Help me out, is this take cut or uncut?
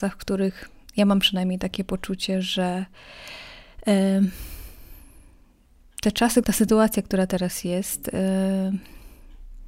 cut